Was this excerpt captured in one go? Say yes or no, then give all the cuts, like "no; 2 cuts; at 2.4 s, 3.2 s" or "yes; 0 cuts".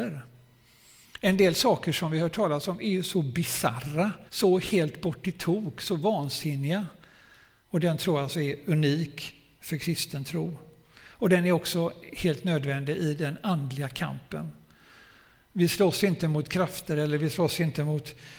no; 2 cuts; at 4.3 s, 7.7 s